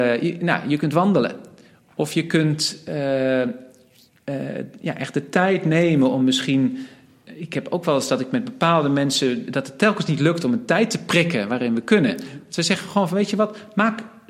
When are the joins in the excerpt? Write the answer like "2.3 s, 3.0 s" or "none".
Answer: none